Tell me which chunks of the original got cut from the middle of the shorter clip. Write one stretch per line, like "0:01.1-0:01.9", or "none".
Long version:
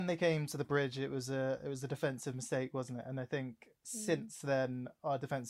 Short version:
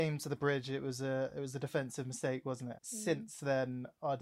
0:03.0-0:03.8